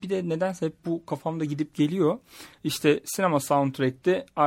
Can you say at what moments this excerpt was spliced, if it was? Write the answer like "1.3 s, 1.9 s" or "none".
none